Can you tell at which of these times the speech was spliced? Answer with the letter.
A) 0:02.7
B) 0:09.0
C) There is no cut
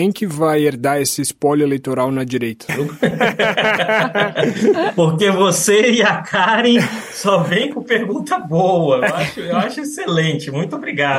A